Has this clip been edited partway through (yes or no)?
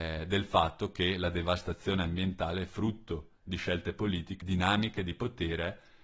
yes